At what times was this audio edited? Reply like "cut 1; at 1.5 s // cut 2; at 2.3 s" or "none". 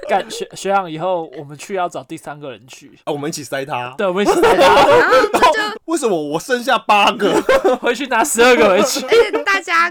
cut 1; at 3.0 s // cut 2; at 5.7 s